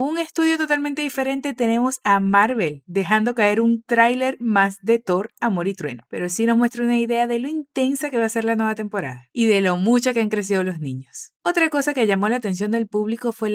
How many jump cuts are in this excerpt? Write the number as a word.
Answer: one